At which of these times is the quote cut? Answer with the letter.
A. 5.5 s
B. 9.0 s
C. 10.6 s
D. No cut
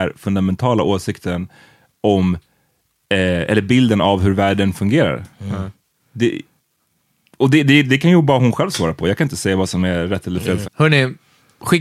C